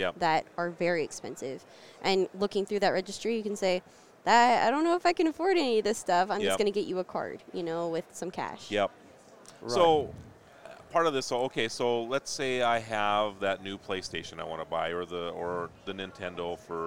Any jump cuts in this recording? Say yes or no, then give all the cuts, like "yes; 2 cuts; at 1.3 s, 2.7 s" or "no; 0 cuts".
no; 0 cuts